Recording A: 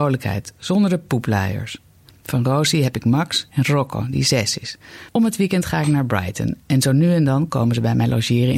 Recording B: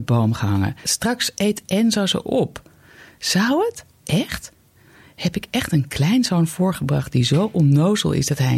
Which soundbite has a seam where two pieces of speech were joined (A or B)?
A